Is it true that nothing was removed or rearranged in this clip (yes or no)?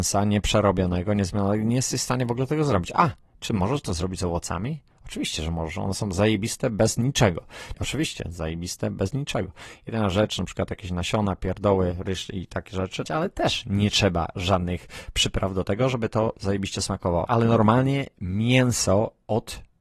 no